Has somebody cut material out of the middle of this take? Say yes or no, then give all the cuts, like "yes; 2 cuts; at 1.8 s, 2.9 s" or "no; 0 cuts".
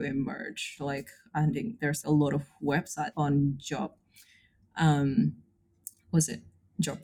yes; 2 cuts; at 2.0 s, 3.1 s